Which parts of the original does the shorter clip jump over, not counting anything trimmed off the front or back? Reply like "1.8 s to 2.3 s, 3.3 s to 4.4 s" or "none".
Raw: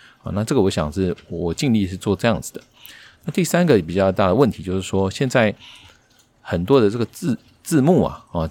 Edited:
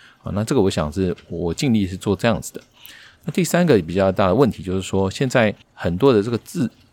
5.6 s to 6.3 s

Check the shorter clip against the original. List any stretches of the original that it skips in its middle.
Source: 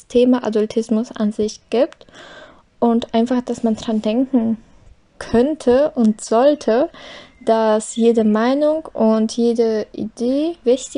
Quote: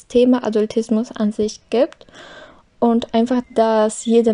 3.4 s to 7.3 s

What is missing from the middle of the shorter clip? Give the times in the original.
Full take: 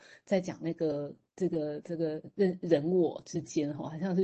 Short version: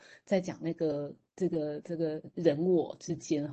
2.3 s to 2.6 s

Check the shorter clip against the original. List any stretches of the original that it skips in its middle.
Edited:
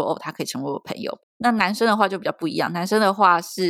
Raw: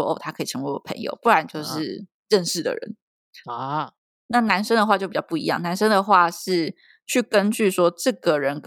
1.2 s to 4.1 s

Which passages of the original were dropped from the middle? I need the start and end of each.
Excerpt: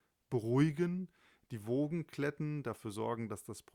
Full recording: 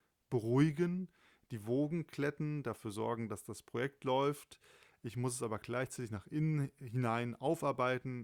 none

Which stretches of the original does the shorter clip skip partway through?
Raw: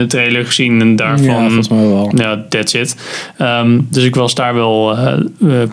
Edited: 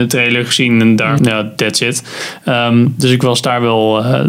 1.2 s to 2.1 s

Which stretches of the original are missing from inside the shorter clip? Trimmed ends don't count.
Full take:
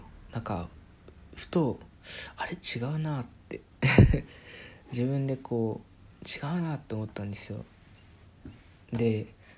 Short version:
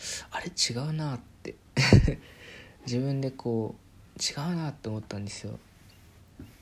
none

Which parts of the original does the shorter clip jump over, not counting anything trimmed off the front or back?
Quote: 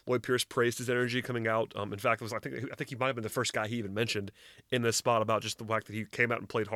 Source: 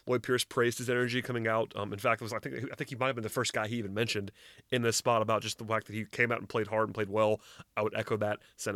none

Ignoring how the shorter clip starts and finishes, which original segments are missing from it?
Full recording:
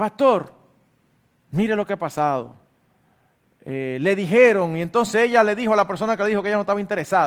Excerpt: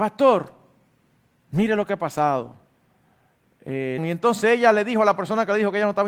4.0 s to 4.7 s

